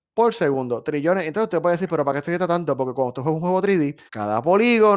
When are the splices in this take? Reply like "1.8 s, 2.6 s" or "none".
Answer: 4.1 s

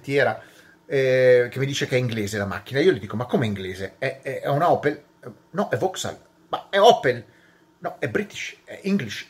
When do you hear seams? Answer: none

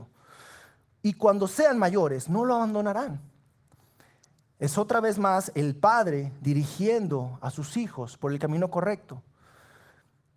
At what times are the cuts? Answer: none

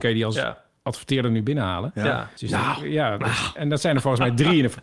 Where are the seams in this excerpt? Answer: 2.4 s

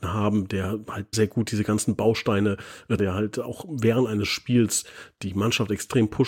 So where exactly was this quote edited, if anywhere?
1.1 s, 3.0 s

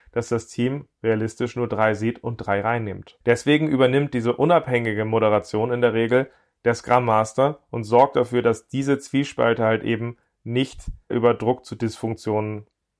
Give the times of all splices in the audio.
none

